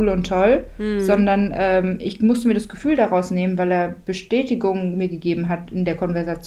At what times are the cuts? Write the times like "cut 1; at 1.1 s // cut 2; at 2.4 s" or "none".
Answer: none

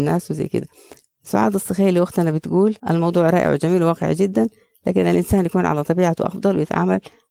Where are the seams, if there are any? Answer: cut 1; at 2.8 s

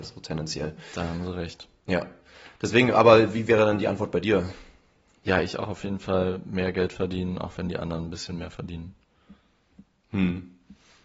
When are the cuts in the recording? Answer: none

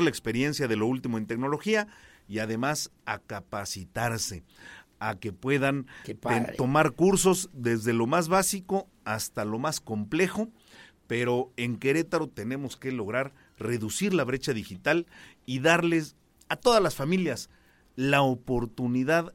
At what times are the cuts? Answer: none

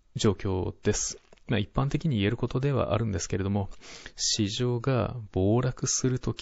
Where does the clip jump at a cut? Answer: none

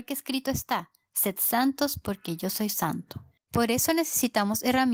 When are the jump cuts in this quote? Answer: cut 1; at 3.4 s

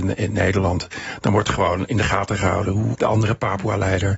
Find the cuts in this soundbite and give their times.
cut 1; at 2.9 s

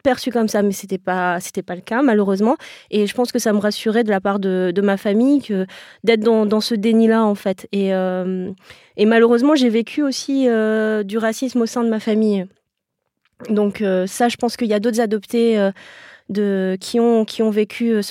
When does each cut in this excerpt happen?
none

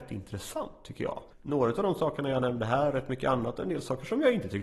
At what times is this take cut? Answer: cut 1; at 1.3 s

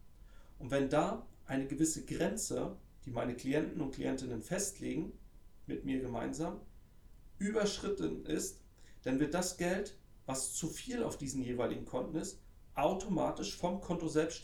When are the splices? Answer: none

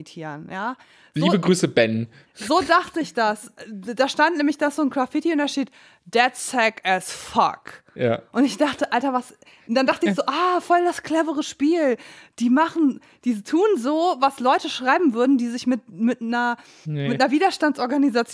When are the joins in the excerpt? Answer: none

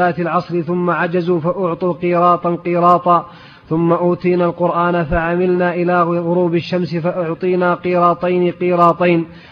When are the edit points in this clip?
none

